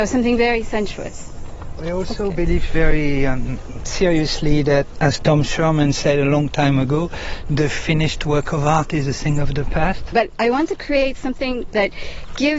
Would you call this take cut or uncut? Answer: cut